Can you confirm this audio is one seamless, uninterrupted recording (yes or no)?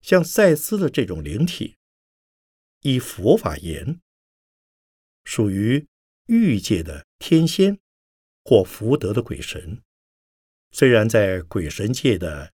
no